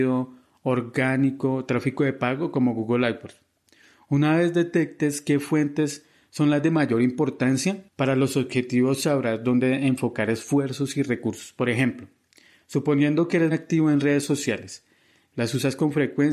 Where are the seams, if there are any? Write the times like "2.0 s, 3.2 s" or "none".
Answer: 13.5 s, 15.3 s